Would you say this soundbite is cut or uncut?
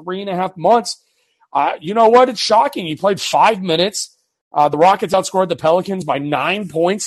uncut